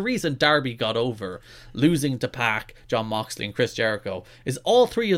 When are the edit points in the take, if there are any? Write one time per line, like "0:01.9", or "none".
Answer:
none